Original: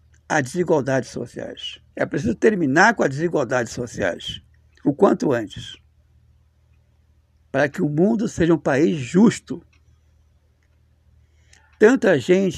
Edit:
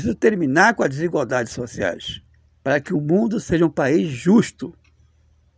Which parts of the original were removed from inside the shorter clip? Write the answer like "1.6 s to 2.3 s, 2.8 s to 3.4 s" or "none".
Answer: 4.7 s to 7.3 s